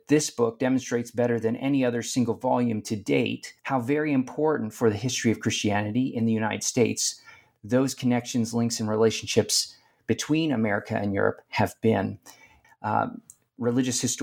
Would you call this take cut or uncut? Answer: cut